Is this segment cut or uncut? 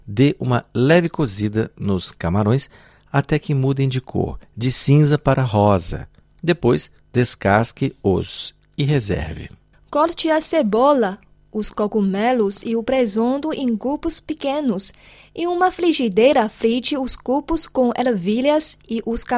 uncut